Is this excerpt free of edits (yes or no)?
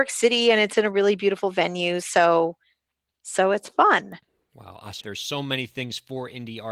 no